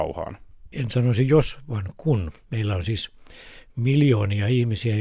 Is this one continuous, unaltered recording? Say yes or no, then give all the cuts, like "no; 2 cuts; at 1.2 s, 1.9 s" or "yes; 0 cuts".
no; 1 cut; at 2.4 s